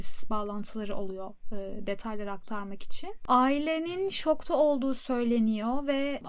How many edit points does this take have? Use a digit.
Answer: 0